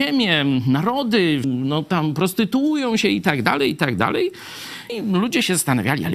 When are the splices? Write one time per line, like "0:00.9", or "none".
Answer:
0:01.4
0:04.9

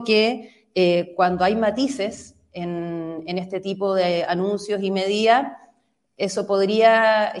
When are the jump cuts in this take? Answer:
none

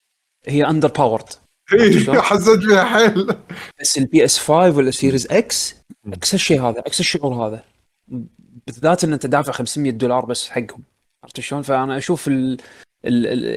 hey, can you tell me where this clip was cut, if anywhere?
none

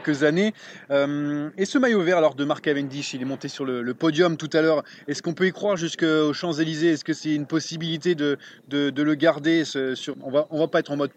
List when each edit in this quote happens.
0:10.1

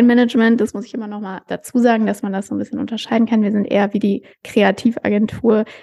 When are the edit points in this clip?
none

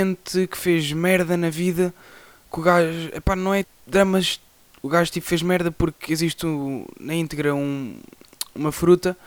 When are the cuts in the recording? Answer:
0:03.6

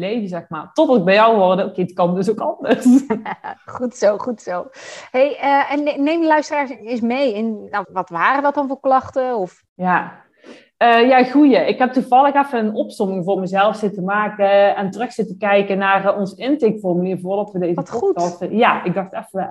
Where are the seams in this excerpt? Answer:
0:07.8
0:09.7

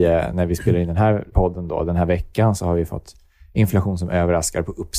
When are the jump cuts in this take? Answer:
0:01.3

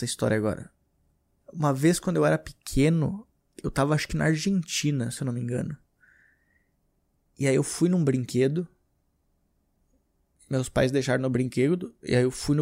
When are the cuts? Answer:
none

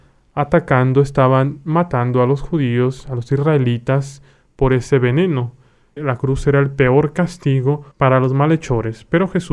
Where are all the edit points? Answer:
0:06.0
0:07.9

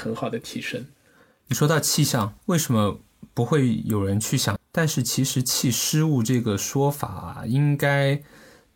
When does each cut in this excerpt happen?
0:02.4
0:04.6

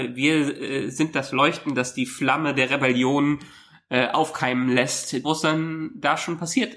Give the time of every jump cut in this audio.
0:05.2

